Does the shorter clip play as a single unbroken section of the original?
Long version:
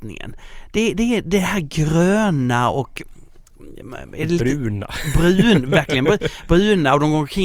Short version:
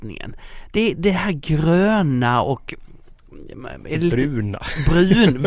no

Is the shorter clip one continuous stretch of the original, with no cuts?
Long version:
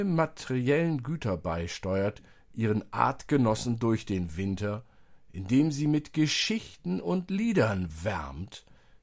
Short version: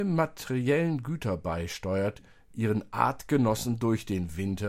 yes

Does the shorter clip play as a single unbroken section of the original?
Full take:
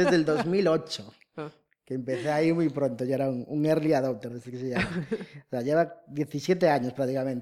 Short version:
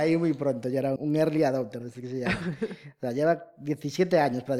no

